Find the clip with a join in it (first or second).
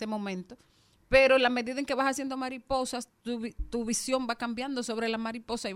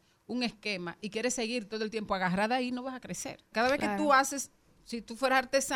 second